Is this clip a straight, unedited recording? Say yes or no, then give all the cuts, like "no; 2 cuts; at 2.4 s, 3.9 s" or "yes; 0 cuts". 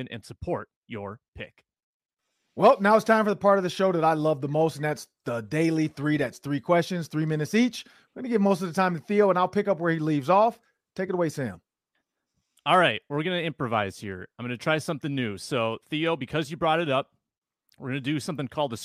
yes; 0 cuts